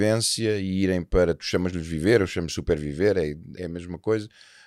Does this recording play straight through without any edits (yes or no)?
no